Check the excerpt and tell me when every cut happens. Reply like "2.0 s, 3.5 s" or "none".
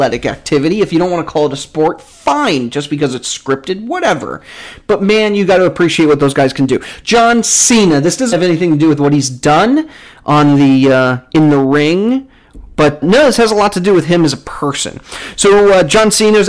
8.3 s, 13.0 s